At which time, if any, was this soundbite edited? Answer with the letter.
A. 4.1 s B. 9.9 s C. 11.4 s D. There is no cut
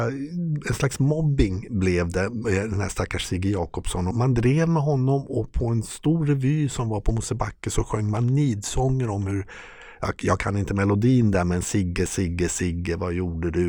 A